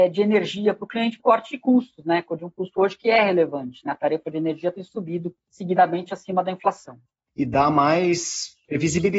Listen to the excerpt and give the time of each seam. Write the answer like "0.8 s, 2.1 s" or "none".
1.2 s